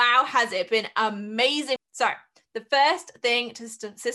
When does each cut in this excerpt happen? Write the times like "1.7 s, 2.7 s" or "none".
1.8 s